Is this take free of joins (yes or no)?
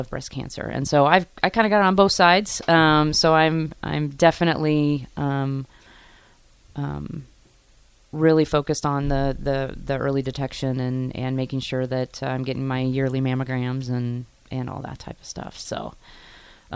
yes